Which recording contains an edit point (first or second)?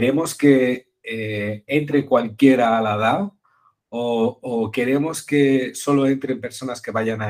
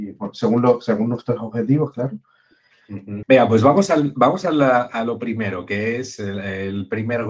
second